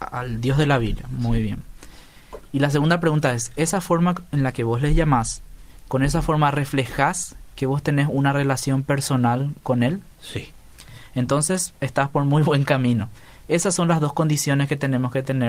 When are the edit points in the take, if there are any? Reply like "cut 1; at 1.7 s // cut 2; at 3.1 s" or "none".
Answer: cut 1; at 10.1 s

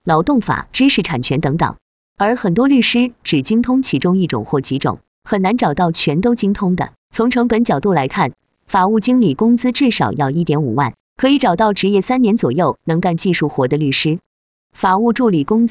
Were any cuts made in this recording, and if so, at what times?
cut 1; at 7.0 s

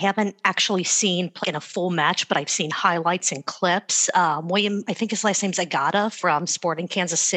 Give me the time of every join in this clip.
cut 1; at 1.4 s

